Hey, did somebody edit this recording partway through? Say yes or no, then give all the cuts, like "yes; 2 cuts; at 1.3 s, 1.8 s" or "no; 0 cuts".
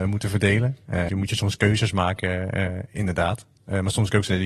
yes; 1 cut; at 1.1 s